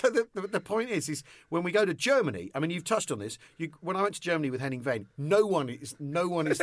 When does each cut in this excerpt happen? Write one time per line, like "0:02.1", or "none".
none